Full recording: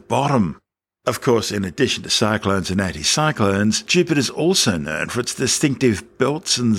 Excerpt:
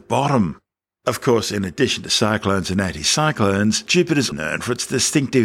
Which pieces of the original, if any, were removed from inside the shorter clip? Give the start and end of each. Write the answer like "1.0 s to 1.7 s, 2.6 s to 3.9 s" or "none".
4.3 s to 4.8 s